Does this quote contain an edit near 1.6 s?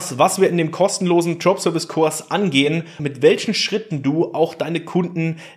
no; 1 cut; at 3.0 s

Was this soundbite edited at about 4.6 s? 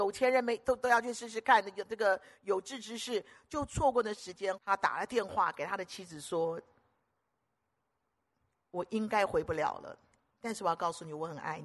yes; 1 cut; at 4.6 s

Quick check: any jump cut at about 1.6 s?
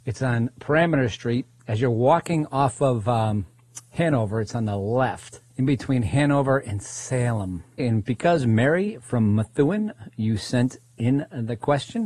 yes; 2 cuts; at 1.6 s, 7.8 s

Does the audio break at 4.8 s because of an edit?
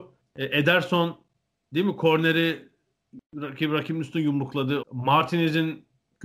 yes; 1 cut; at 4.8 s

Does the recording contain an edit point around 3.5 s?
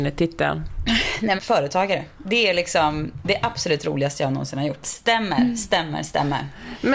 no; 2 cuts; at 1.4 s, 4.8 s

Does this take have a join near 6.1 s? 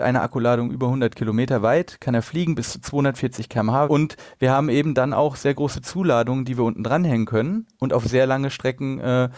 no; 1 cut; at 3.9 s

